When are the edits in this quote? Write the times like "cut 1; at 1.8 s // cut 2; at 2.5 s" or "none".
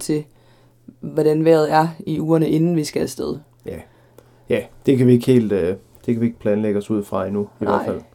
none